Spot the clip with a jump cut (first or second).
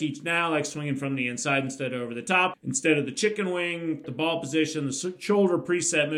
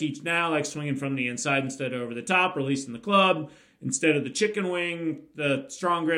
first